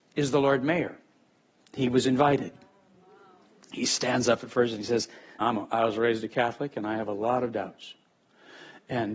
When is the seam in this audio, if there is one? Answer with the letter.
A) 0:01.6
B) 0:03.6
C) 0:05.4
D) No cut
C